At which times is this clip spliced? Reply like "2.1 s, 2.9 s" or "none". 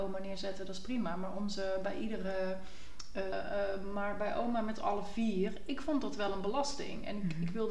3.3 s